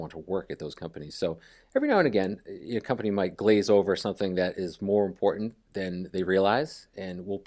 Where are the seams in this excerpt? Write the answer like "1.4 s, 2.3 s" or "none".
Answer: none

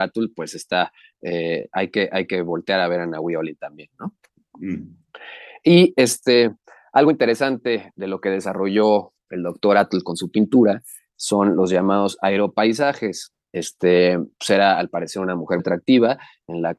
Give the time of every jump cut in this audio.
13.5 s, 15.6 s

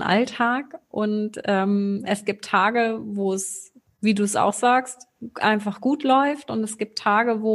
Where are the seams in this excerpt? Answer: none

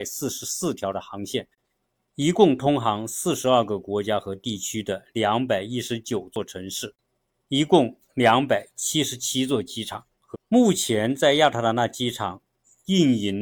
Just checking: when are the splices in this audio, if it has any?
10.3 s

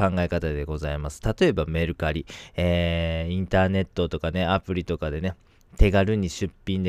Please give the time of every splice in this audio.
none

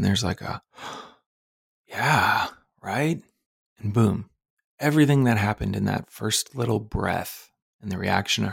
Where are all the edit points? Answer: none

